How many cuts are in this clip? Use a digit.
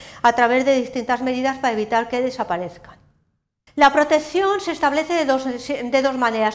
1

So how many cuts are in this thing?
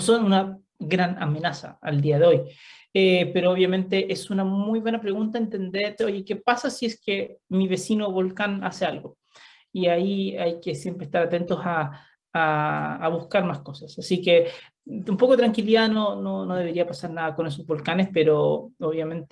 1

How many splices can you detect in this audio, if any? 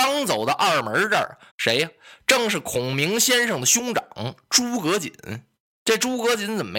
1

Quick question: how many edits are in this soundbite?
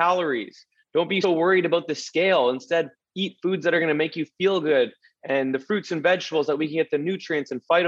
1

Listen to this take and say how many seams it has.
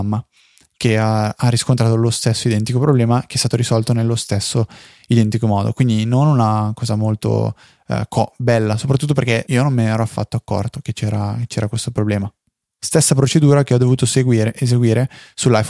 2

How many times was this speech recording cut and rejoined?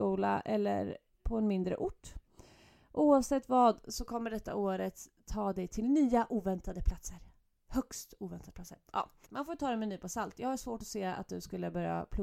1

